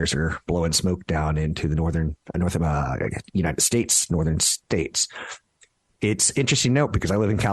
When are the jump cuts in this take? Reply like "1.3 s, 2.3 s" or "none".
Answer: 2.3 s